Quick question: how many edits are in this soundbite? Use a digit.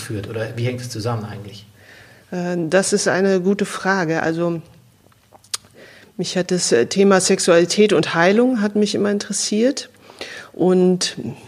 0